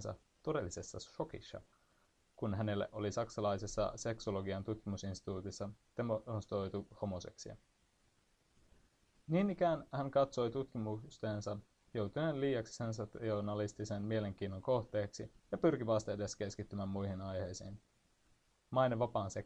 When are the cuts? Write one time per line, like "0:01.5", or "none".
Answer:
0:15.4